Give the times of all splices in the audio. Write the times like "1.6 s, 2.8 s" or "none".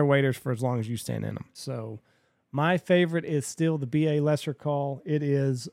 1.5 s